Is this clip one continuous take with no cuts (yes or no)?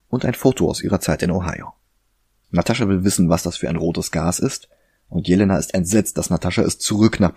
no